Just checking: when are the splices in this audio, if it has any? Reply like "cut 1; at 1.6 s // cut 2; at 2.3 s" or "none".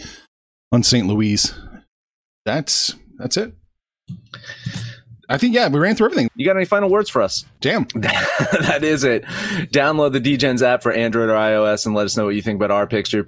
cut 1; at 6.3 s // cut 2; at 7.6 s